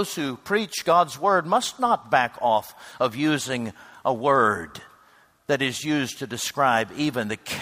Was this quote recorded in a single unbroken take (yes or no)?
yes